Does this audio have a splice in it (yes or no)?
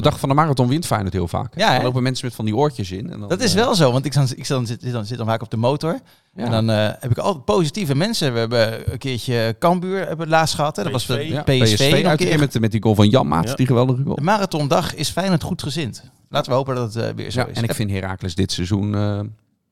no